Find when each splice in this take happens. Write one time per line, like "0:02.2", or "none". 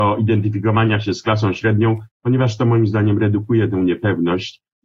none

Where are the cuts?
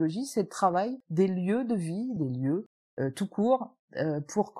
0:02.2

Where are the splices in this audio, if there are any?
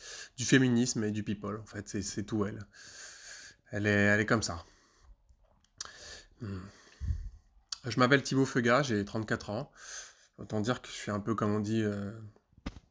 none

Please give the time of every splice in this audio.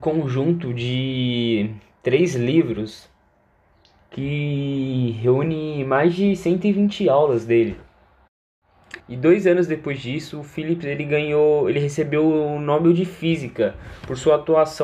0:09.0

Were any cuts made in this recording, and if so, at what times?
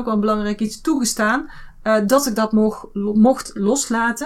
none

